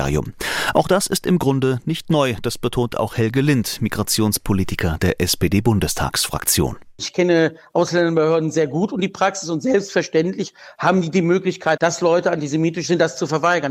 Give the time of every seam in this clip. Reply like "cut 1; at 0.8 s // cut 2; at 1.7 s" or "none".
cut 1; at 11.8 s